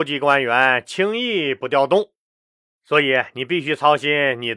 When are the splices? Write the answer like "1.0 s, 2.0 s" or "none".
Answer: 2.6 s

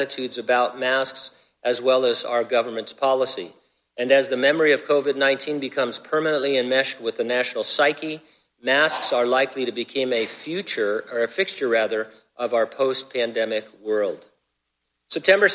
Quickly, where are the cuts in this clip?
none

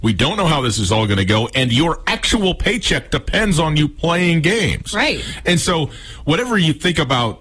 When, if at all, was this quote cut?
none

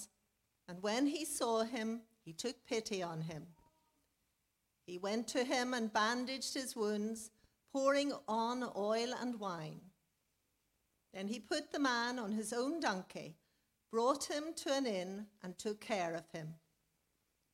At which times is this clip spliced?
none

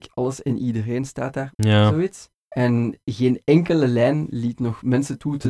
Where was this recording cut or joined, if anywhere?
1.5 s

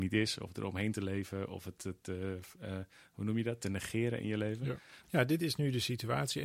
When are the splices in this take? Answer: 5.0 s

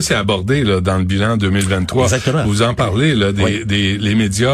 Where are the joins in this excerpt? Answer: none

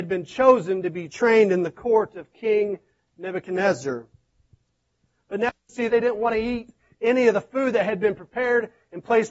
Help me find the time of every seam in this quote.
5.9 s

